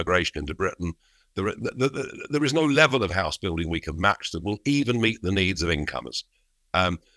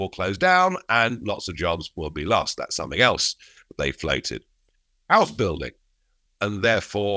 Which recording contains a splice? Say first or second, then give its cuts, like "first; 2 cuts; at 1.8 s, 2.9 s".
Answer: second; 1 cut; at 6.3 s